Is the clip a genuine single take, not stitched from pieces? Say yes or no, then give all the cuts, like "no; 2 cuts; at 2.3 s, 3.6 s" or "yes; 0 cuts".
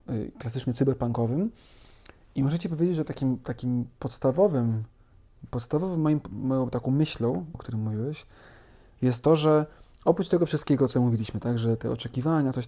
no; 1 cut; at 7.5 s